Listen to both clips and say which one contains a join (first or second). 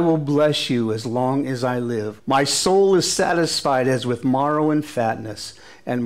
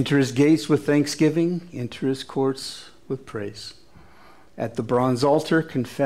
first